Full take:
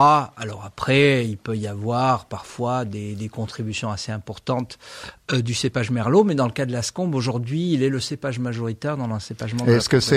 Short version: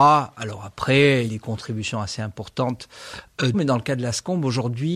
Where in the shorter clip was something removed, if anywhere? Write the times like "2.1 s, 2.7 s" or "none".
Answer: 1.3 s, 3.5 s